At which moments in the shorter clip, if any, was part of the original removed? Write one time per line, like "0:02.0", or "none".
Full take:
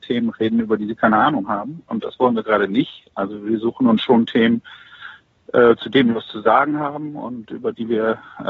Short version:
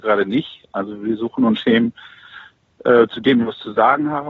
0:01.6